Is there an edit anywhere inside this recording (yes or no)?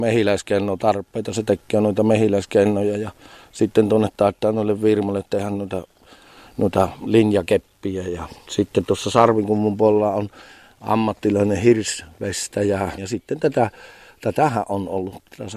yes